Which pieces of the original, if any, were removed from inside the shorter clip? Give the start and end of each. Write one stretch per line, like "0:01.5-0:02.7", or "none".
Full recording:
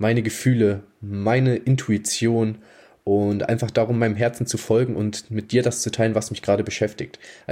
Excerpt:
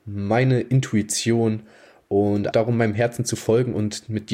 0:03.5-0:03.7

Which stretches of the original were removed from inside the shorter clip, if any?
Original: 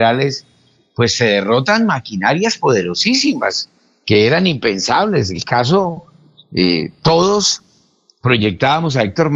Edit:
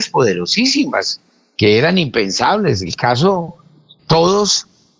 0:06.5-0:06.9

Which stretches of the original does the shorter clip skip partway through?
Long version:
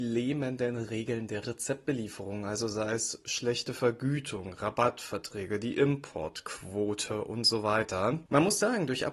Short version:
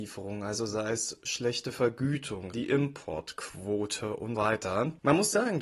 0:04.5-0:05.6
0:07.4-0:07.6

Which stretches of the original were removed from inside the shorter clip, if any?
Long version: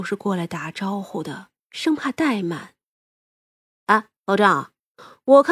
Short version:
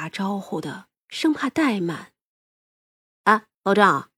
none

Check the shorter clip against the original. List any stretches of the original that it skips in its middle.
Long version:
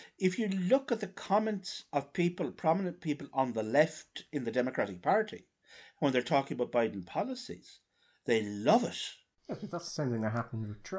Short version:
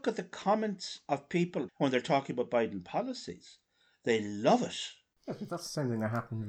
0:02.5-0:05.9

